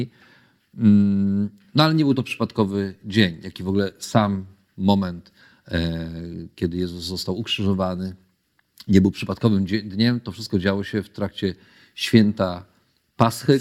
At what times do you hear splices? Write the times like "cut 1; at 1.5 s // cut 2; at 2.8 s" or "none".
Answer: none